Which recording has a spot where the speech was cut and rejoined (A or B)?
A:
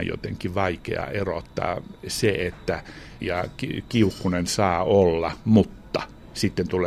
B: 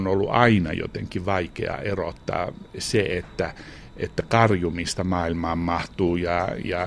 A